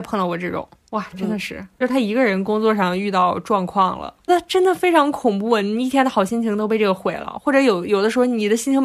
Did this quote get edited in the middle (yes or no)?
yes